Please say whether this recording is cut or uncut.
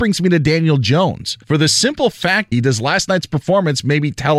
cut